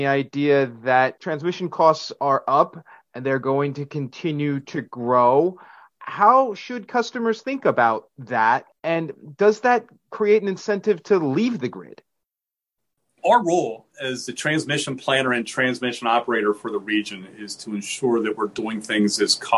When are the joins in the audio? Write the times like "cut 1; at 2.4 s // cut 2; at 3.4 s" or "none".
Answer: none